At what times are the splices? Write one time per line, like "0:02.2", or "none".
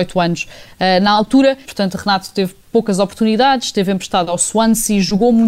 0:01.6